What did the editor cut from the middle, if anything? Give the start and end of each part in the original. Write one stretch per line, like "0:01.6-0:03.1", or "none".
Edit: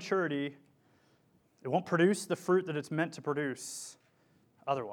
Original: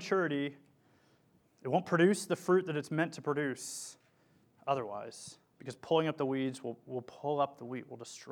none